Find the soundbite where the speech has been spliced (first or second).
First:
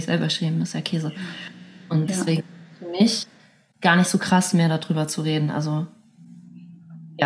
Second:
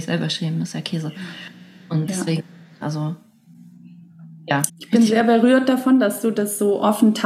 second